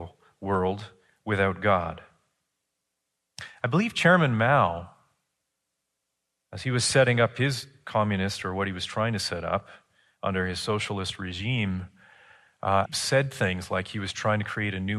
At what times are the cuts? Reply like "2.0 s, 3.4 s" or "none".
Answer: 12.9 s